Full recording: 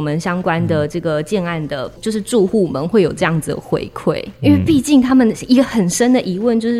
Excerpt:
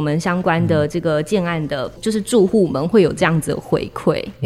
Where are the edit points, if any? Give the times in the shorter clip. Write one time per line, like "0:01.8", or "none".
none